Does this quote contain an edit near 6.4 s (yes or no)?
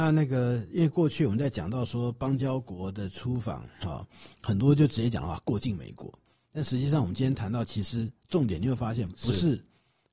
no